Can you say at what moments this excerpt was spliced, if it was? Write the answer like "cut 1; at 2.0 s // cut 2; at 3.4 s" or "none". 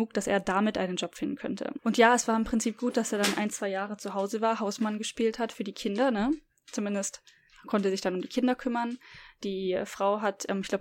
cut 1; at 1.8 s